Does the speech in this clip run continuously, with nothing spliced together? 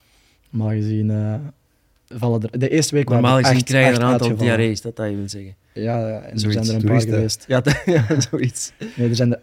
yes; 0 cuts

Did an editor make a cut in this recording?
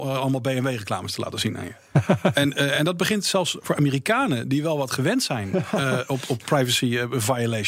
no; 0 cuts

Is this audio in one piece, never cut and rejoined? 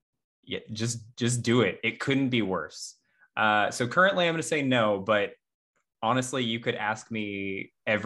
yes; 0 cuts

